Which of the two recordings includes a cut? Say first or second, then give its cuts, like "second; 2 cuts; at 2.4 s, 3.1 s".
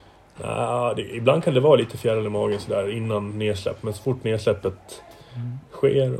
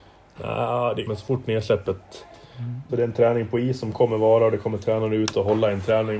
second; 2 cuts; at 1.0 s, 2.9 s